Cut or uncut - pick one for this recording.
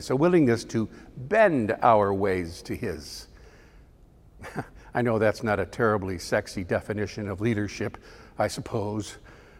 uncut